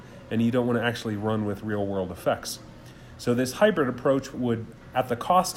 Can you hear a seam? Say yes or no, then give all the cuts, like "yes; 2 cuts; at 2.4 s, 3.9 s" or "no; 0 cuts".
yes; 1 cut; at 4.3 s